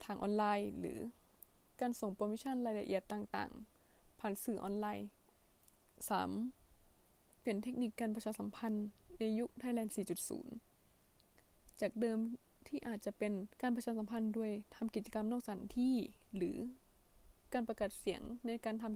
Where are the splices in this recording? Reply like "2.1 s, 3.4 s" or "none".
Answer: 7.4 s, 13.5 s